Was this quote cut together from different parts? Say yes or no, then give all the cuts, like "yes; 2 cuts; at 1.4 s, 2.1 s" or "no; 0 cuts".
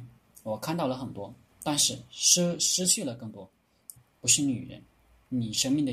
yes; 2 cuts; at 1.5 s, 4.0 s